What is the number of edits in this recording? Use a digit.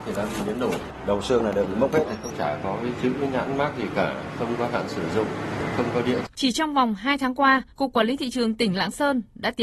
2